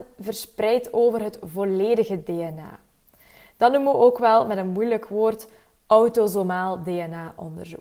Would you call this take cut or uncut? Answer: uncut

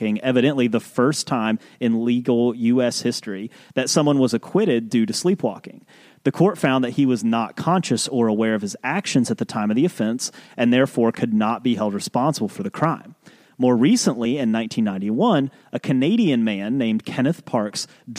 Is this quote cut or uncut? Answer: uncut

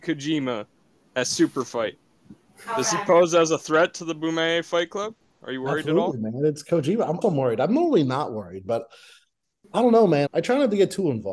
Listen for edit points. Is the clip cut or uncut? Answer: cut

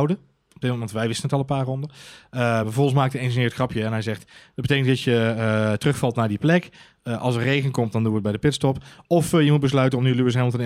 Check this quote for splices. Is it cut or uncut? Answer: uncut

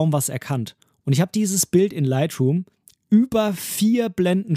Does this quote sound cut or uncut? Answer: uncut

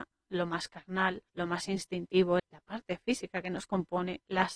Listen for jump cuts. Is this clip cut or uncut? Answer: cut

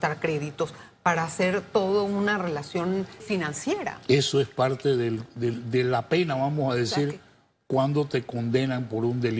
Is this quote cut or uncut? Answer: cut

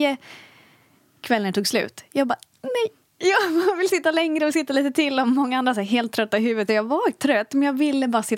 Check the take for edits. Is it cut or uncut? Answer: uncut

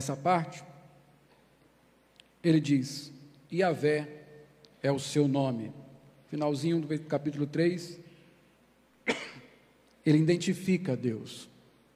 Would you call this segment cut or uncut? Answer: uncut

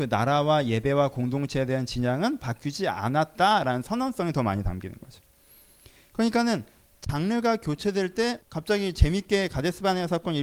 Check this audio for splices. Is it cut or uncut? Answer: cut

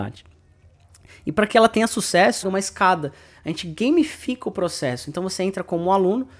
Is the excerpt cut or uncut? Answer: cut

